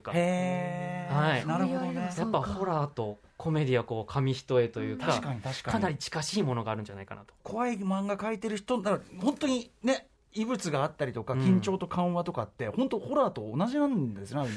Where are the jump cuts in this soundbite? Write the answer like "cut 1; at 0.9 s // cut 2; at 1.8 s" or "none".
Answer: cut 1; at 7.4 s